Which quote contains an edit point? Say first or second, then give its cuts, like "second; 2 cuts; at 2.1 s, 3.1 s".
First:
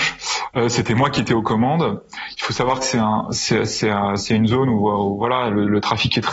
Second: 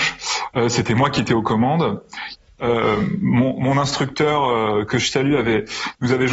second; 1 cut; at 2.4 s